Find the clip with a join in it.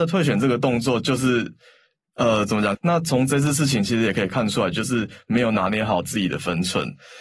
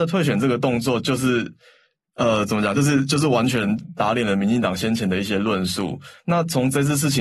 first; 2 cuts; at 2.7 s, 4.7 s

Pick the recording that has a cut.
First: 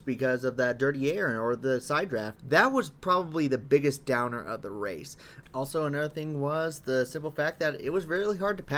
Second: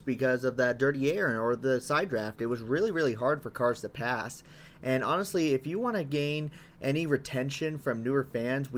first; 1 cut; at 2.4 s

